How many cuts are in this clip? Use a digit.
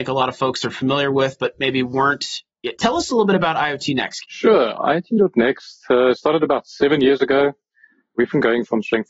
2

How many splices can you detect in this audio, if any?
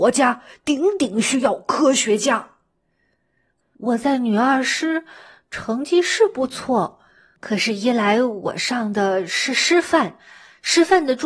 1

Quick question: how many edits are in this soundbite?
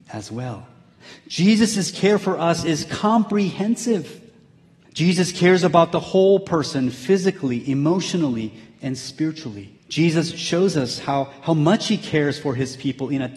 2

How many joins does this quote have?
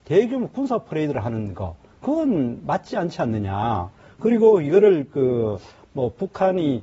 0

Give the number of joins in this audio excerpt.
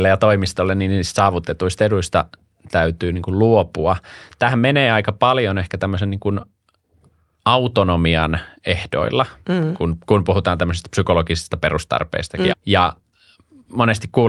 1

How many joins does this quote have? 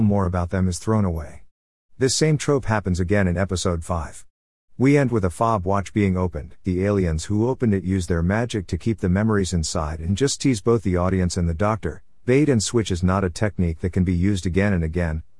1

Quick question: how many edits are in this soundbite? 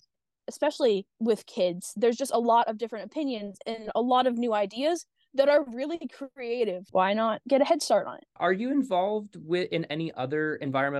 1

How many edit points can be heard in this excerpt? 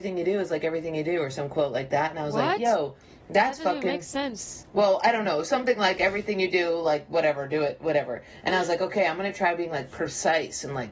0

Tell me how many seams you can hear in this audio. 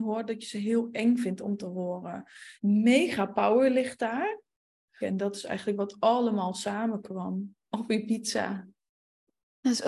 3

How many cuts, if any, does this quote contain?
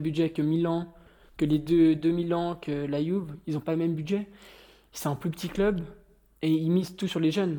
0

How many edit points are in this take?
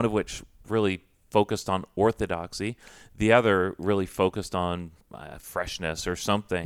1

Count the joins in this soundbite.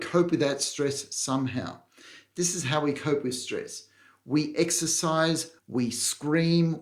1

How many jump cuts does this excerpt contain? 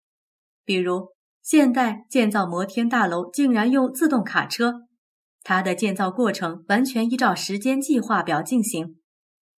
0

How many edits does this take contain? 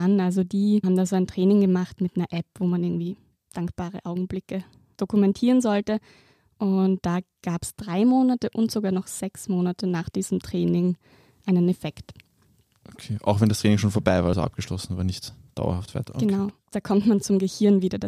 0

